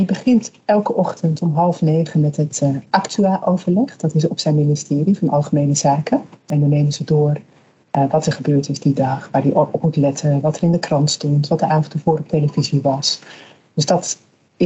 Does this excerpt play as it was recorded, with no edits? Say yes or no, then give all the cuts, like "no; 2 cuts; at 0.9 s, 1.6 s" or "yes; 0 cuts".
yes; 0 cuts